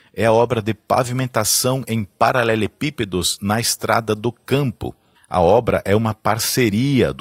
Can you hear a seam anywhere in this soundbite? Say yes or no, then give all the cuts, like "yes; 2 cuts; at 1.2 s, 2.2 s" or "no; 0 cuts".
yes; 1 cut; at 5.1 s